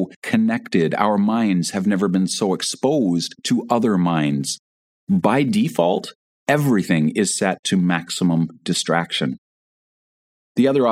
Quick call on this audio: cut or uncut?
cut